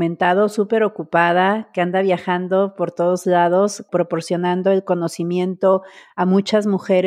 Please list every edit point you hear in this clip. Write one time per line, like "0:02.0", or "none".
0:03.9